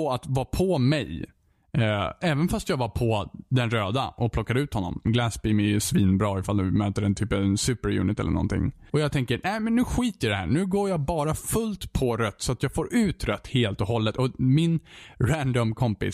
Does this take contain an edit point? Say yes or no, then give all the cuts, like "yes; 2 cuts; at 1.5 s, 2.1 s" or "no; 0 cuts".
yes; 2 cuts; at 5.0 s, 8.9 s